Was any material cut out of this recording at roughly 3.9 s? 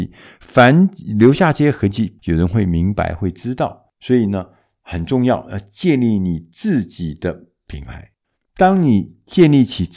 no; 1 cut; at 2.2 s

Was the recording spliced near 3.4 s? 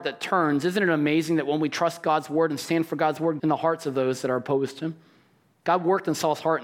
yes; 1 cut; at 3.4 s

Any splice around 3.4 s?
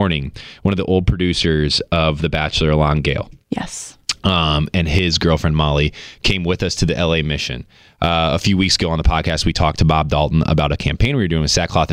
no; 0 cuts

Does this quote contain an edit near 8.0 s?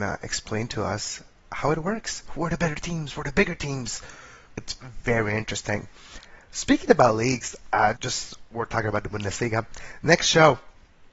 yes; 2 cuts; at 4.5 s, 8.0 s

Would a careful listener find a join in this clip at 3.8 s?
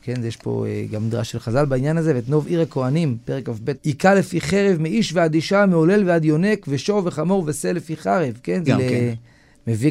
yes; 2 cuts; at 3.8 s, 8.7 s

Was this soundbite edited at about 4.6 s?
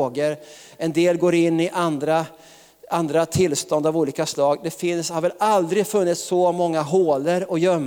no; 0 cuts

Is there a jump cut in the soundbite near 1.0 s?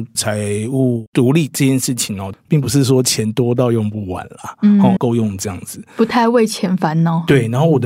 no; 2 cuts; at 2.3 s, 5.0 s

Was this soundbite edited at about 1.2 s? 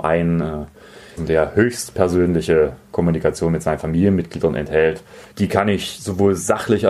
yes; 2 cuts; at 1.2 s, 5.3 s

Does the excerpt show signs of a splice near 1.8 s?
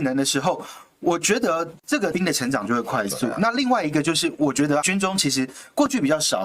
yes; 1 cut; at 1.8 s

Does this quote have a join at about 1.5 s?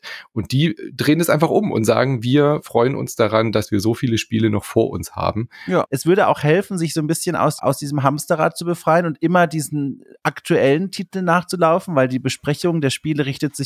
no; 2 cuts; at 5.8 s, 7.6 s

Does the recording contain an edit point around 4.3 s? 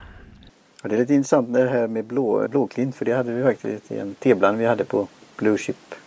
no; 1 cut; at 2.5 s

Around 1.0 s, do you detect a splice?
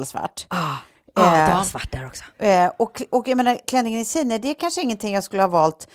no; 1 cut; at 3.6 s

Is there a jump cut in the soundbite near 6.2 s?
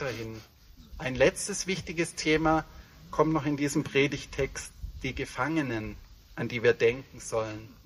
yes; 2 cuts; at 0.9 s, 6.2 s

